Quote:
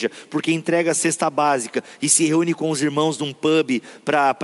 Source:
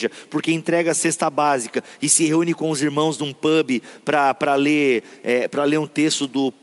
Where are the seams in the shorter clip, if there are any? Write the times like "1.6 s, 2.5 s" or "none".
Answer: none